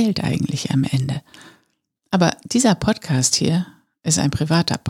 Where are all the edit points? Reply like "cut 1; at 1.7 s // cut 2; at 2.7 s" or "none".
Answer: cut 1; at 2.0 s